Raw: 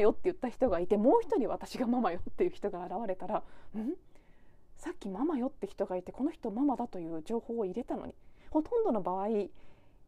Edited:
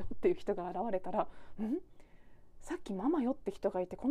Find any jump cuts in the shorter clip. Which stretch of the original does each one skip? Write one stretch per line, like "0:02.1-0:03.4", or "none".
none